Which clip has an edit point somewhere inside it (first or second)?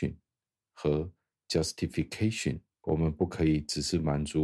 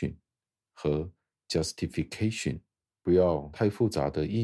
first